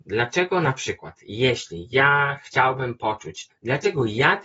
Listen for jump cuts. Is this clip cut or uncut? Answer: cut